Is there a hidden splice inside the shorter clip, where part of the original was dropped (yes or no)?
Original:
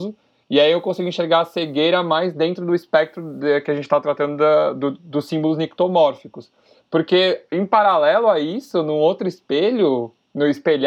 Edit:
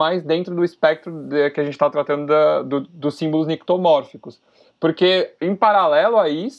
no